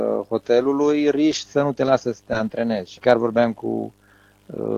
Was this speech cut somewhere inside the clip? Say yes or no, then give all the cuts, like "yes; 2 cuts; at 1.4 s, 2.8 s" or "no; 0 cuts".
yes; 1 cut; at 3.0 s